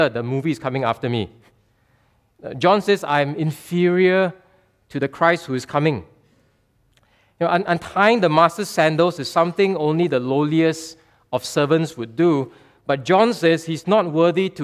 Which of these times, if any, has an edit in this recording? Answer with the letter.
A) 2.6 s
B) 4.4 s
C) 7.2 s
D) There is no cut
D